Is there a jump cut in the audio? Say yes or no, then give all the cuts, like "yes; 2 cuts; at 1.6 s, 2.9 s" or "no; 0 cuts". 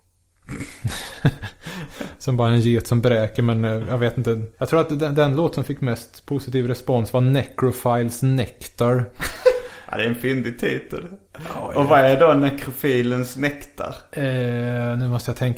yes; 1 cut; at 4.5 s